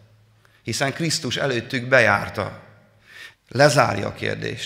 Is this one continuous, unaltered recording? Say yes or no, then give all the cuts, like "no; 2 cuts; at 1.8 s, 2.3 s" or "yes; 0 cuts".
no; 1 cut; at 3.3 s